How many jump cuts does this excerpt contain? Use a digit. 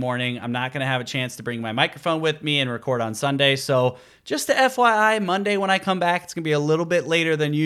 0